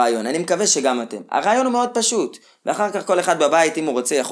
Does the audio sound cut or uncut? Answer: uncut